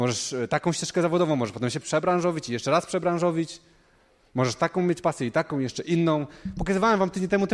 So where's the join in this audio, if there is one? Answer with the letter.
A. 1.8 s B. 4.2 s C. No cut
A